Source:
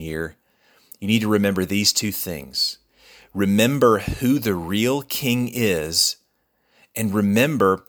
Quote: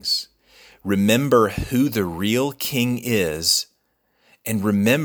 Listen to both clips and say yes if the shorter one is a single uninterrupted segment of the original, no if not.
yes